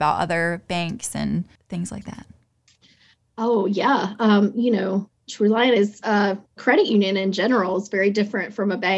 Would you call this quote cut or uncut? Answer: cut